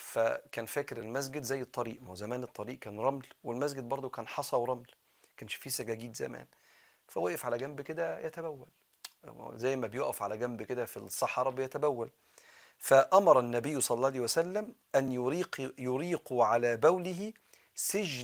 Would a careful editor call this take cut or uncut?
uncut